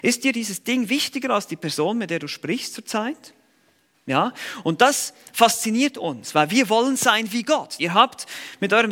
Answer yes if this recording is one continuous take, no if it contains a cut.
no